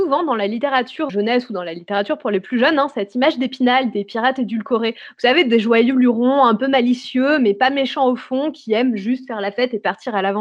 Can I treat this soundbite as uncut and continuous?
no; 1 cut; at 1.1 s

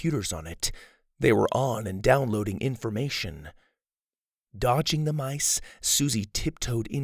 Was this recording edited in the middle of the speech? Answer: no; 0 cuts

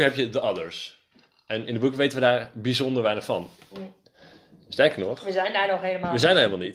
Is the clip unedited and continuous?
yes; 0 cuts

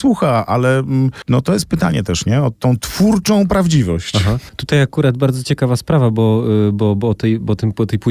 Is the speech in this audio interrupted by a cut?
no; 0 cuts

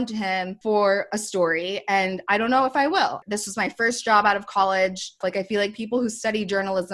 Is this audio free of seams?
no; 2 cuts; at 3.2 s, 5.2 s

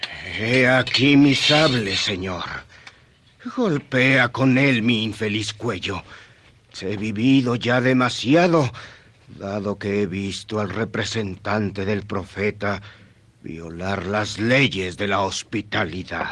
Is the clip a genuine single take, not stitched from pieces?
no; 1 cut; at 6.7 s

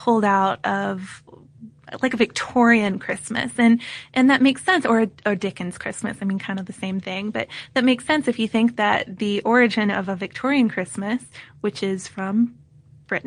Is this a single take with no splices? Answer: yes; 0 cuts

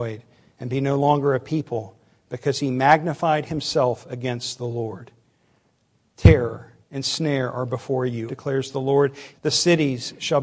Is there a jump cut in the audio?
yes; 3 cuts; at 6.8 s, 8.3 s, 9.3 s

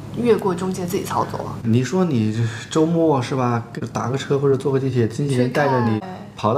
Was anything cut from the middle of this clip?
yes; 1 cut; at 1.6 s

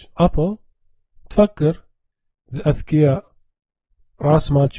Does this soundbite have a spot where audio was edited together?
no; 0 cuts

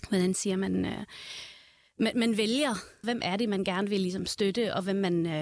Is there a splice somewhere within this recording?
yes; 1 cut; at 3.0 s

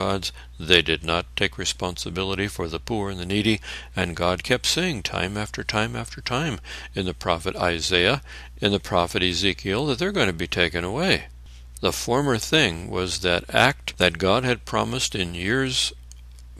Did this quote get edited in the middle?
yes; 2 cuts; at 8.5 s, 11.7 s

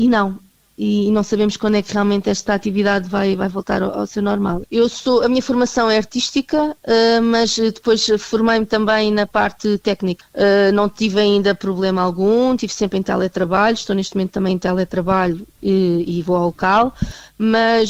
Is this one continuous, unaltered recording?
no; 2 cuts; at 4.6 s, 10.2 s

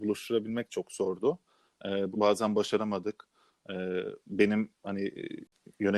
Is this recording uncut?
no; 1 cut; at 2.1 s

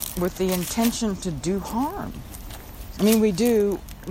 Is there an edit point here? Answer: yes; 1 cut; at 2.9 s

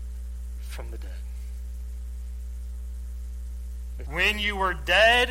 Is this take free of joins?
no; 1 cut; at 4.0 s

